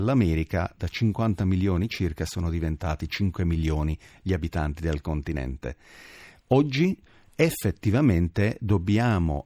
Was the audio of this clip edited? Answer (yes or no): no